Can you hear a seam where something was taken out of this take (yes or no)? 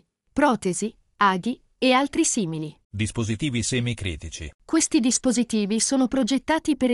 yes